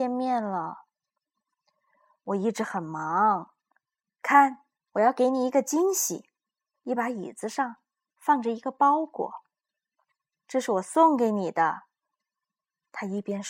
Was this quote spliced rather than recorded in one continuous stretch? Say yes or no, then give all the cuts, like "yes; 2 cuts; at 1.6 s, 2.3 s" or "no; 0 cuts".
yes; 2 cuts; at 6.7 s, 10.4 s